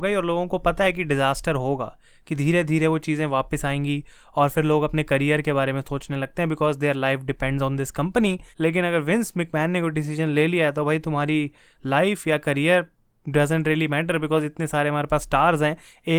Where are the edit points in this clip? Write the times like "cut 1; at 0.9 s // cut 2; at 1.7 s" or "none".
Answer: cut 1; at 8.5 s

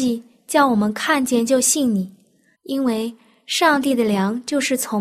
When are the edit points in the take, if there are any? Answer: cut 1; at 2.5 s

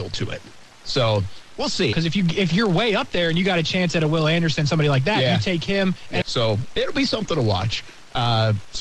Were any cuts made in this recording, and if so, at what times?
cut 1; at 1.9 s // cut 2; at 6.2 s

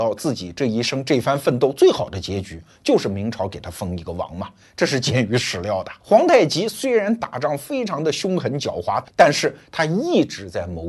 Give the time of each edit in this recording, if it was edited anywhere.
cut 1; at 6.0 s // cut 2; at 9.0 s

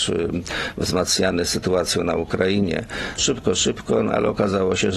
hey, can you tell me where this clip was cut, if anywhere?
cut 1; at 3.2 s

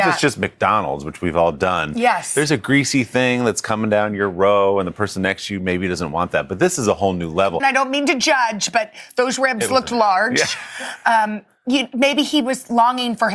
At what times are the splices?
cut 1; at 7.6 s

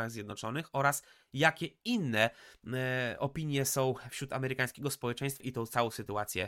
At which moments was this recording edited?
cut 1; at 5.4 s

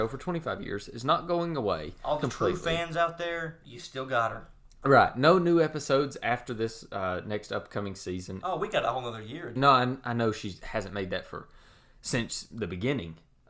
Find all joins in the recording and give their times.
cut 1; at 8.4 s // cut 2; at 9.6 s

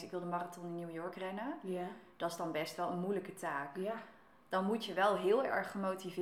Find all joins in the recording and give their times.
none

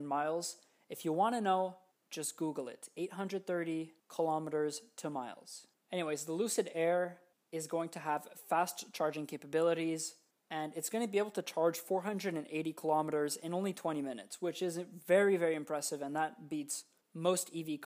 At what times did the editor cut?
none

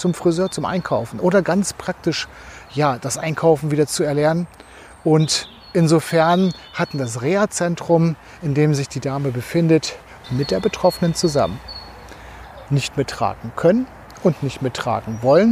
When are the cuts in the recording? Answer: cut 1; at 10.2 s // cut 2; at 12.7 s

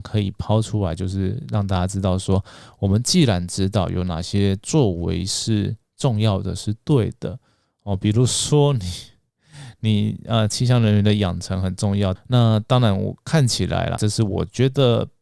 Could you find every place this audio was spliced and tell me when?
cut 1; at 12.2 s // cut 2; at 14.0 s

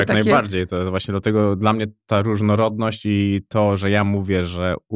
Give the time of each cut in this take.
none

